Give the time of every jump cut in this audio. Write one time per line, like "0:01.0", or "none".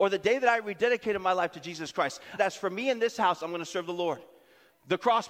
0:02.4